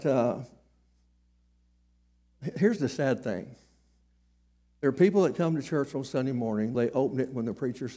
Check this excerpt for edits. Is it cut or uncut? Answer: cut